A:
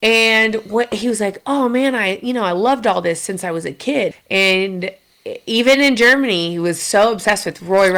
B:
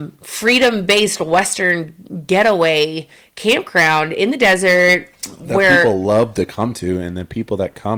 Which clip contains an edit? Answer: A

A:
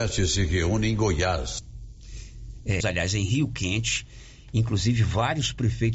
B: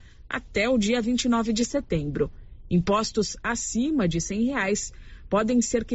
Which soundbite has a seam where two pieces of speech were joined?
A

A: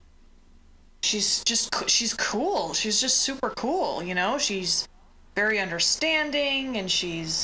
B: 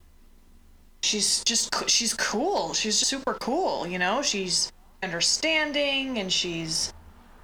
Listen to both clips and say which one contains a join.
B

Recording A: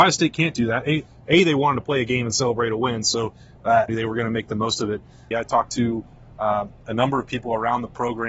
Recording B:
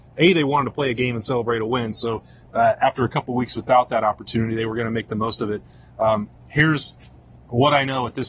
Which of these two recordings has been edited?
A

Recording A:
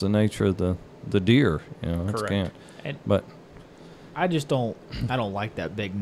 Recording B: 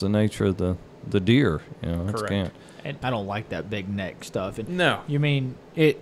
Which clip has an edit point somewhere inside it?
B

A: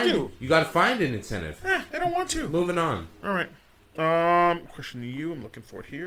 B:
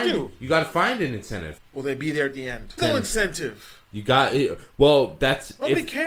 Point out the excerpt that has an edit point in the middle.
B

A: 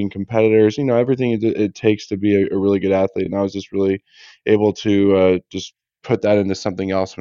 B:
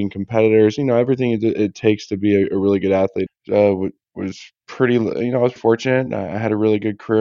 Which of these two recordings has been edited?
B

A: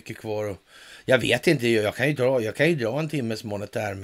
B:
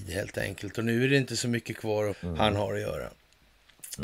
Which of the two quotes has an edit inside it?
B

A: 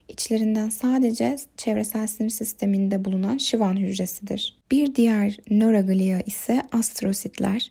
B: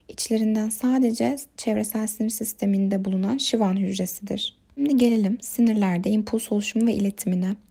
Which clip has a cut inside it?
A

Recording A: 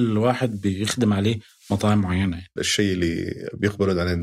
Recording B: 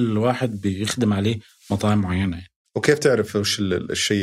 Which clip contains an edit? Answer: A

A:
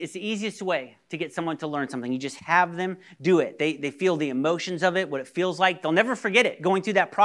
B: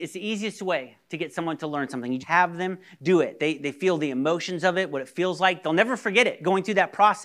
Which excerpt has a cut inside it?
B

